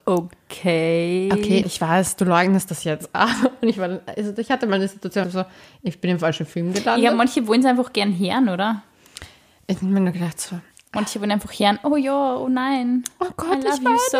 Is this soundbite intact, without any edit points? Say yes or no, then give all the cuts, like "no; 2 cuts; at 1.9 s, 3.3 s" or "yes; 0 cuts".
no; 2 cuts; at 1.6 s, 5.2 s